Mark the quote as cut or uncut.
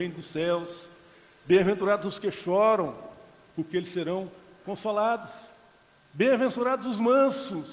uncut